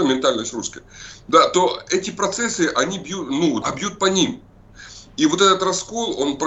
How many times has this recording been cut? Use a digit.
1